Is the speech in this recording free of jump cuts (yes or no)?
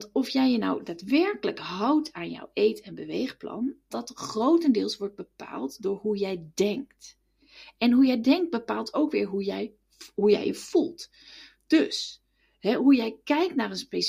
no